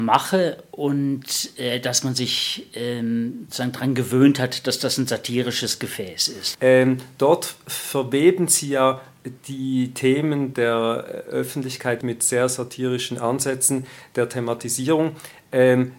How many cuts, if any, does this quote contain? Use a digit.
2